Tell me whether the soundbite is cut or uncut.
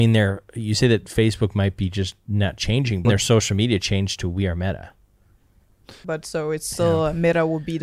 cut